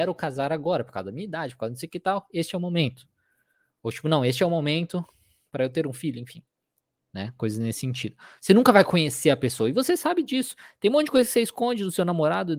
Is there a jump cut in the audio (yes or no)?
no